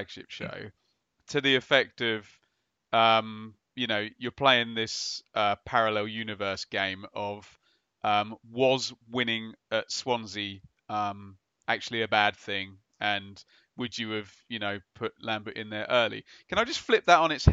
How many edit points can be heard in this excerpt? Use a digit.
0